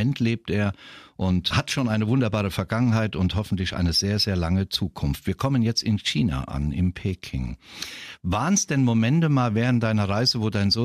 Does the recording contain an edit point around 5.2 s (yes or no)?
no